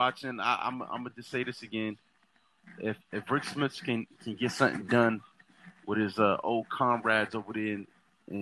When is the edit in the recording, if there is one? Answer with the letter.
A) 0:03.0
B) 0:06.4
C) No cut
A